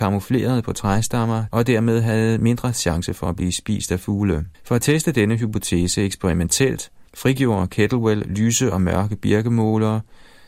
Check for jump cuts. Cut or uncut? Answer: cut